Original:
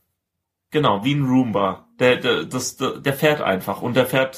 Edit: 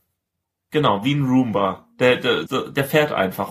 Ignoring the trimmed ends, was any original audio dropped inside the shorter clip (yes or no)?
yes